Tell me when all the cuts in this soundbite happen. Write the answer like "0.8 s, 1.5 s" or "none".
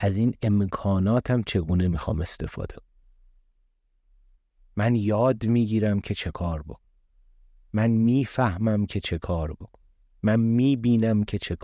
none